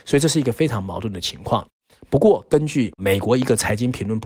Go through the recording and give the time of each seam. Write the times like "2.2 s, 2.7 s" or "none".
none